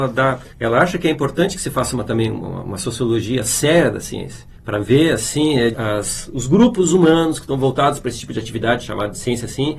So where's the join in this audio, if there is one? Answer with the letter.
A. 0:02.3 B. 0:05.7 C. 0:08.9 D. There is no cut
B